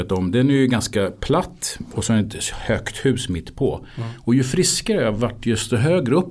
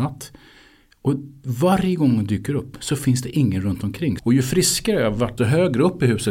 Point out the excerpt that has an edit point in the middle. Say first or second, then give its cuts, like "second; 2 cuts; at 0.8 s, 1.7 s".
second; 2 cuts; at 4.2 s, 5.4 s